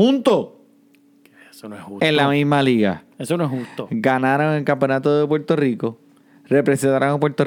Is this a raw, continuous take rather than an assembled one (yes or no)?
yes